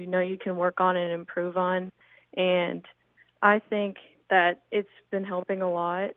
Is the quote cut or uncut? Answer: uncut